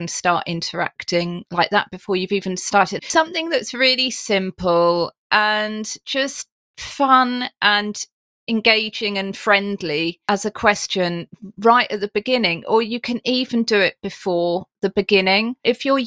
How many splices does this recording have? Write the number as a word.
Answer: one